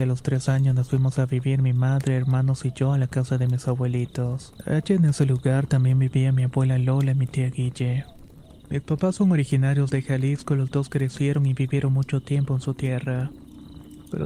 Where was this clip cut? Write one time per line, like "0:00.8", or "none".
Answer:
0:04.6
0:08.6